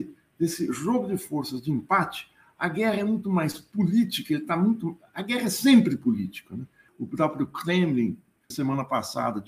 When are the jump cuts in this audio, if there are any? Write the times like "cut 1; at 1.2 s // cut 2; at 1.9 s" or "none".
cut 1; at 6.9 s // cut 2; at 8.5 s